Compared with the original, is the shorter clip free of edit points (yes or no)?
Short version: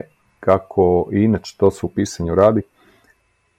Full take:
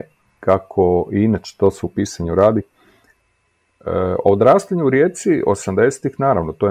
yes